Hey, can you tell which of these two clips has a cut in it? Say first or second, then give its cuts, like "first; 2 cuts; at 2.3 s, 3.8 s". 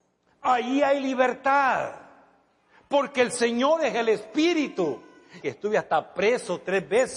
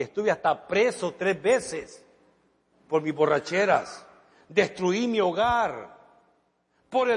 first; 1 cut; at 5.4 s